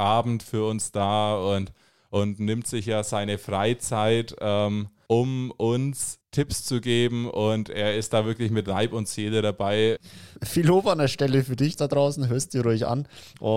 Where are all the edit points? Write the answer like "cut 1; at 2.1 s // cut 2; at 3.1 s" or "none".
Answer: cut 1; at 10.3 s // cut 2; at 11.8 s